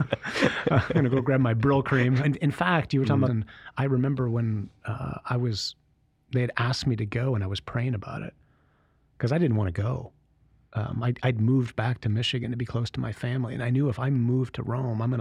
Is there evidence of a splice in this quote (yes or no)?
yes